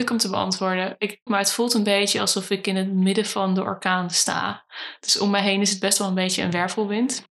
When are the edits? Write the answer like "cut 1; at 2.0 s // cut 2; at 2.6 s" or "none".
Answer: cut 1; at 1.3 s